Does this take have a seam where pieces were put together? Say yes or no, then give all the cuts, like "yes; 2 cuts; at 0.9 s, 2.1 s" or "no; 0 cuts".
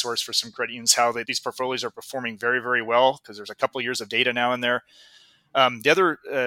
yes; 1 cut; at 1.2 s